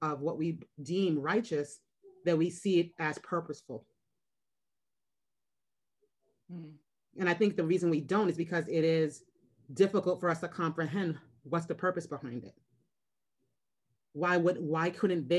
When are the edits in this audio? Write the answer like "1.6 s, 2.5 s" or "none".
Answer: none